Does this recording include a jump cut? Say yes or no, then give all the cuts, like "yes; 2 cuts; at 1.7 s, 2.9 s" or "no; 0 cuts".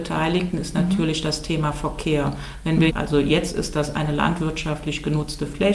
yes; 1 cut; at 2.9 s